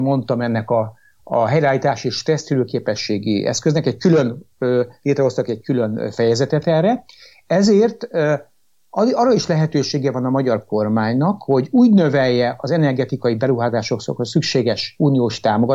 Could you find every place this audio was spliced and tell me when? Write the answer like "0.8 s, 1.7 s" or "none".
none